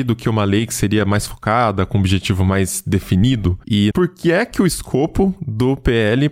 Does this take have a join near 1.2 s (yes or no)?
no